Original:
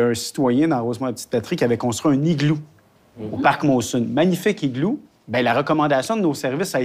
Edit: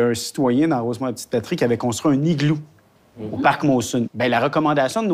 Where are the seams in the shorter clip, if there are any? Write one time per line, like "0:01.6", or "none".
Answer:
0:04.1